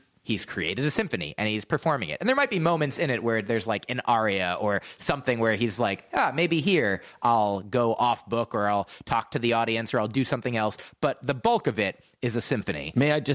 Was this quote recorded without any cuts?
yes; 0 cuts

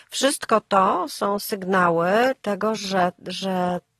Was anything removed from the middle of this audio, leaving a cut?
no; 0 cuts

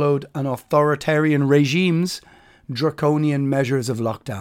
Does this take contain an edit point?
no; 0 cuts

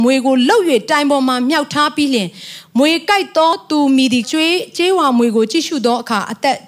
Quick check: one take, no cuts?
no; 1 cut; at 4.2 s

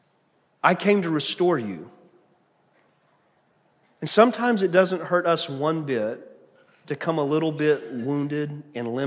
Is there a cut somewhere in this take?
no; 0 cuts

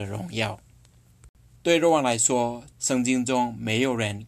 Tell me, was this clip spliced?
yes; 2 cuts; at 1.6 s, 2.7 s

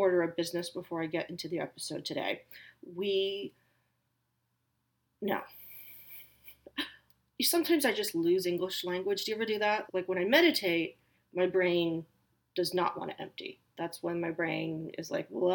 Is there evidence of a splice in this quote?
yes; 1 cut; at 9.9 s

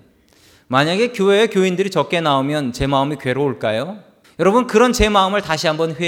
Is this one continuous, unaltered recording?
no; 1 cut; at 4.2 s

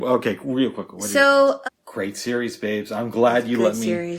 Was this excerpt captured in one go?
no; 1 cut; at 1.6 s

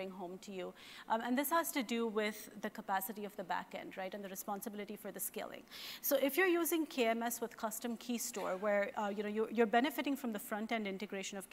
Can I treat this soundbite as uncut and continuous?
yes; 0 cuts

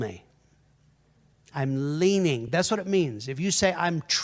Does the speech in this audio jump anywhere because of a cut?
no; 0 cuts

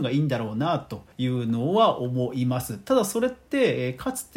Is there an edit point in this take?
yes; 1 cut; at 1.1 s

